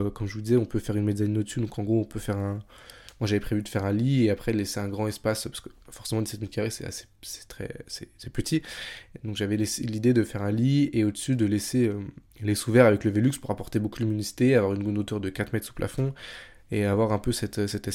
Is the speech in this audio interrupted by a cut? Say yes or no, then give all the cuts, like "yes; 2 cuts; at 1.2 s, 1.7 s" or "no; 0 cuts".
no; 0 cuts